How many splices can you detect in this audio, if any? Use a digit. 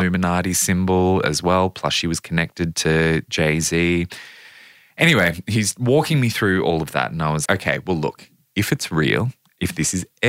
1